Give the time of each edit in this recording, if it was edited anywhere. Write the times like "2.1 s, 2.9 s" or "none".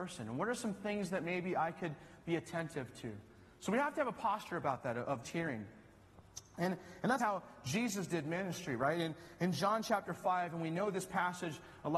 5.2 s, 7.2 s